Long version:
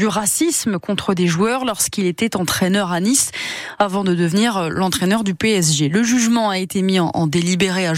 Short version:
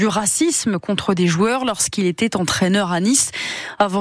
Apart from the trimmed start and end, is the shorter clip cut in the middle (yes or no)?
no